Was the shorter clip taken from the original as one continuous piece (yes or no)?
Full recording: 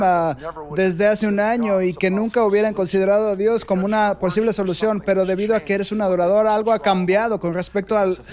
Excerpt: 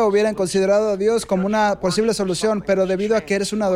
yes